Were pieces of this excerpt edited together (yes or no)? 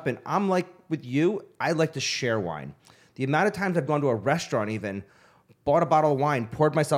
no